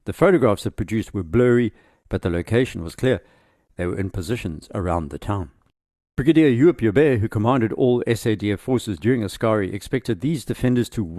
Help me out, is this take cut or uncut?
uncut